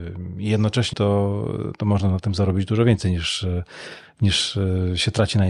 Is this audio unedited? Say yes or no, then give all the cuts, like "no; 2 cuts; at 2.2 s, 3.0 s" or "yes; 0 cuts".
no; 1 cut; at 0.9 s